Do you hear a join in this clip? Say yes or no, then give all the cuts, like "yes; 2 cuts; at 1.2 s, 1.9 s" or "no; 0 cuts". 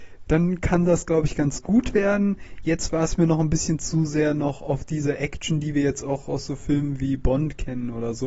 no; 0 cuts